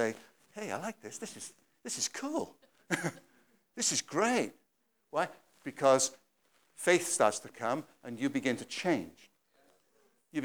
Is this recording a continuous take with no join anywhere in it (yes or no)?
yes